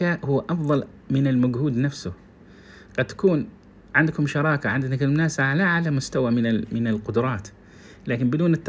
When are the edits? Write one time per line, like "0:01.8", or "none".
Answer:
none